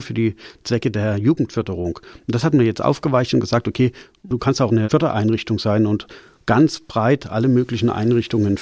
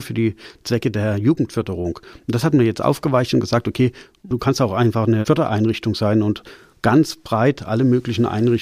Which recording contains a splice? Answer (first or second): first